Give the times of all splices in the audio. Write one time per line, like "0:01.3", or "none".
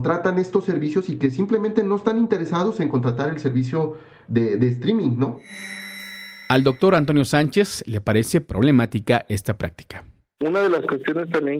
none